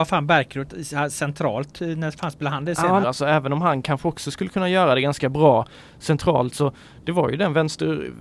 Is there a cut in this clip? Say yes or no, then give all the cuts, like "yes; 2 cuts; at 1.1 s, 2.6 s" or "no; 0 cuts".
yes; 1 cut; at 3.0 s